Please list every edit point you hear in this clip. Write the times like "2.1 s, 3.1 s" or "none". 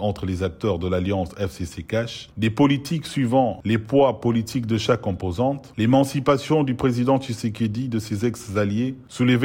2.3 s